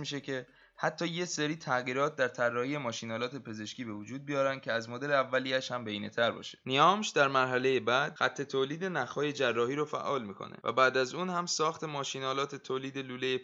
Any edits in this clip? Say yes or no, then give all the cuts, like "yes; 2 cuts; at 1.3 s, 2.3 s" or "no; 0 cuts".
no; 0 cuts